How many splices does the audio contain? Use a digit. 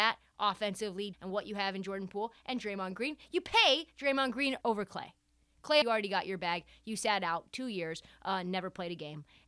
3